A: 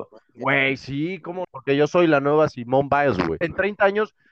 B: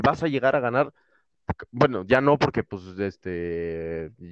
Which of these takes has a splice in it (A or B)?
A